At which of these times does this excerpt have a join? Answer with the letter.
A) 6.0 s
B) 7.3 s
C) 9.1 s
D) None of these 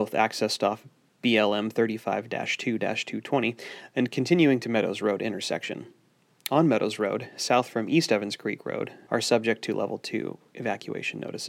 C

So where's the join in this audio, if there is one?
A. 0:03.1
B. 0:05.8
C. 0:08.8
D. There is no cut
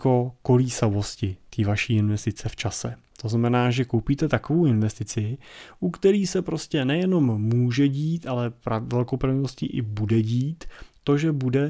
D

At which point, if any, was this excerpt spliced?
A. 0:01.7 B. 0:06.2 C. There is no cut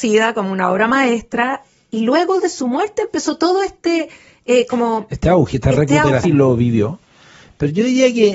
B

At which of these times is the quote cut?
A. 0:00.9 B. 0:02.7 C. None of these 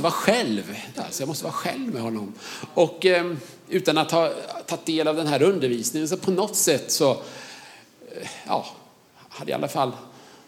A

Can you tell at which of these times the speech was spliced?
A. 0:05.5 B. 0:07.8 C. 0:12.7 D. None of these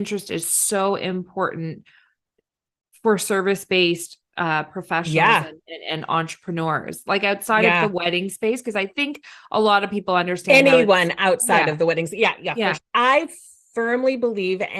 C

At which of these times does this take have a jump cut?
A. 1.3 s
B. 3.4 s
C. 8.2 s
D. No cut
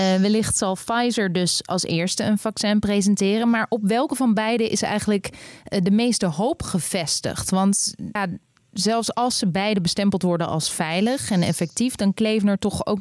C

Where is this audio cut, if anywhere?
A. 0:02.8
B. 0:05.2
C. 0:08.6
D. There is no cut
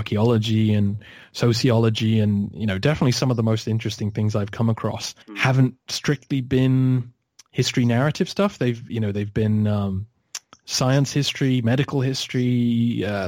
B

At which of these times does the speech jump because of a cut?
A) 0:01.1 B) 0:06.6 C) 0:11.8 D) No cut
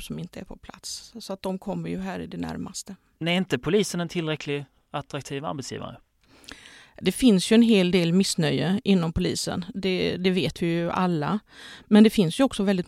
D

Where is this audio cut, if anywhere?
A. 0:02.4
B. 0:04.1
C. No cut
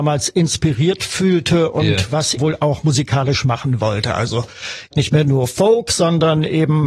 A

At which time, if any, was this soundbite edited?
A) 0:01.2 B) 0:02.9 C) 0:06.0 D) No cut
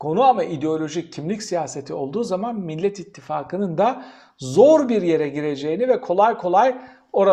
D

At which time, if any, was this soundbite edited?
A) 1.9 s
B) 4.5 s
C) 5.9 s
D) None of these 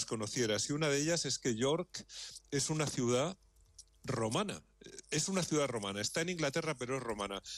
D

